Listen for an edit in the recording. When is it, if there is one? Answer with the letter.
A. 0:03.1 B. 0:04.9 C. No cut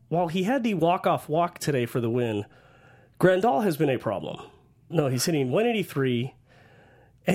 B